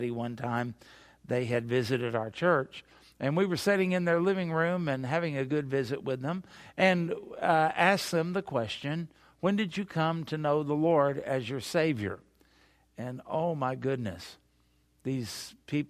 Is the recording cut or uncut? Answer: uncut